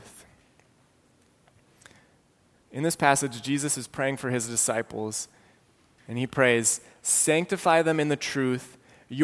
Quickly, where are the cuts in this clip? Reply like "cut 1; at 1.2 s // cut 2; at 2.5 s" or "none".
none